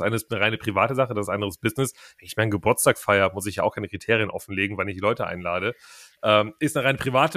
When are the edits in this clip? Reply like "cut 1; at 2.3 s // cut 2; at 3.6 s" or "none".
none